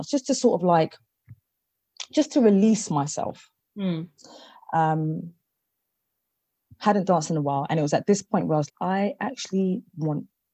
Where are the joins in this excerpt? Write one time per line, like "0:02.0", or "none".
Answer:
0:06.7
0:08.7